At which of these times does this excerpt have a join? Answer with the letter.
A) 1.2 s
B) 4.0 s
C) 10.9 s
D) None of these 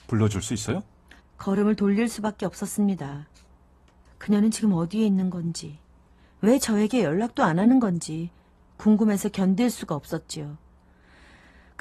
A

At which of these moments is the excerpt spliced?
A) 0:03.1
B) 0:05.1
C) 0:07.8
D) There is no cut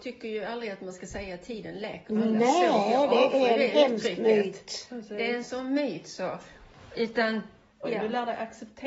C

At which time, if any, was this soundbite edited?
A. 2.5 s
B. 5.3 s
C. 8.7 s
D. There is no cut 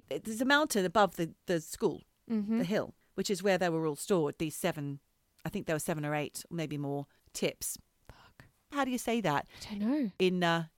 C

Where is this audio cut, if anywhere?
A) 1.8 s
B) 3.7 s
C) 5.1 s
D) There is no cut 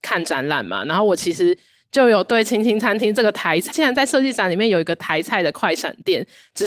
B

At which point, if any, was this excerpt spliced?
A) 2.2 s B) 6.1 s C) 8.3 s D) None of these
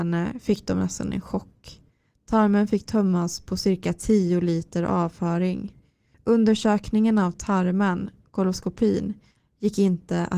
B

